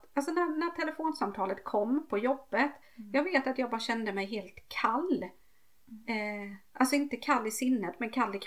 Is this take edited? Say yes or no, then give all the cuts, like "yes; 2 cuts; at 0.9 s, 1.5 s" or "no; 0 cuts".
no; 0 cuts